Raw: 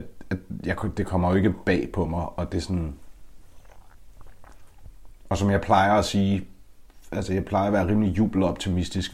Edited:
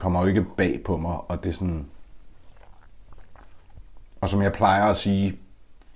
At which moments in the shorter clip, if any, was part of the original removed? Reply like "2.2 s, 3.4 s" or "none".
none